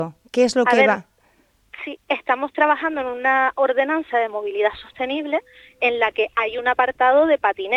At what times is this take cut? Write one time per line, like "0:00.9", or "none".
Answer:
none